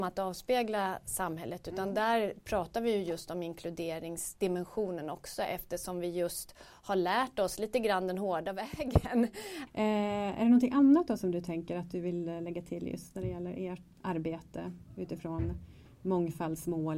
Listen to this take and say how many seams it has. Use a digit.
2